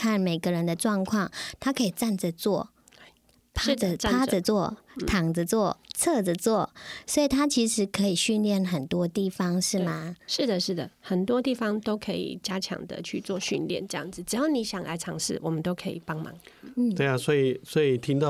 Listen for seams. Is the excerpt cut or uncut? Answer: uncut